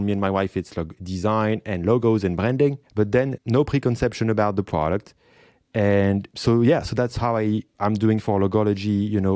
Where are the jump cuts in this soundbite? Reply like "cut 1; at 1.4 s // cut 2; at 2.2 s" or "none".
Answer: cut 1; at 0.9 s // cut 2; at 2.8 s // cut 3; at 6.3 s